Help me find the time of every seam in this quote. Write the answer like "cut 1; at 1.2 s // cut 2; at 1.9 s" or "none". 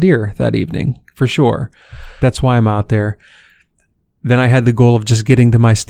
cut 1; at 2.2 s